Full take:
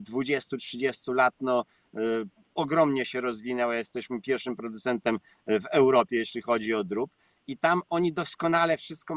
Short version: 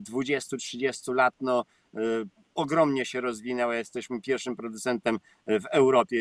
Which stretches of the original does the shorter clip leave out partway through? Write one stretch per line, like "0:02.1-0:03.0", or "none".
none